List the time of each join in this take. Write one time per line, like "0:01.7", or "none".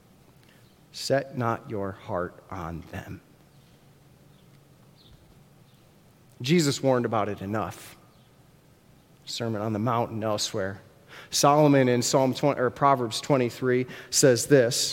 none